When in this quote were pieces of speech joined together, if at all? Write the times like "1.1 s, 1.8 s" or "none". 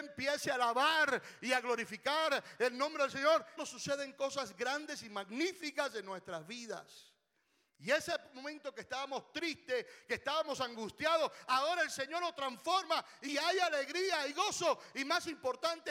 3.6 s